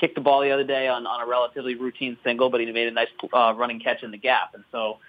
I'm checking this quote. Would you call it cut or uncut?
uncut